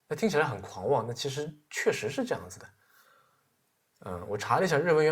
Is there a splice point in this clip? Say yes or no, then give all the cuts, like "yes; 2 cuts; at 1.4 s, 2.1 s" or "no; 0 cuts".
yes; 1 cut; at 3.9 s